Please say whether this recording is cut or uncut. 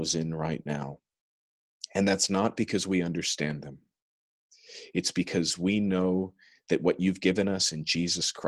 uncut